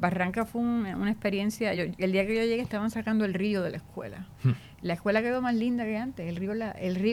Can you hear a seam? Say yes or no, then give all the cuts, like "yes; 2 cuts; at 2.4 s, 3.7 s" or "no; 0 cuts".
no; 0 cuts